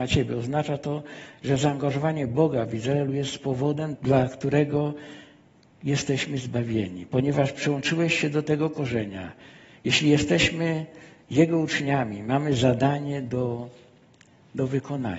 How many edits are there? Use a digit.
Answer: 1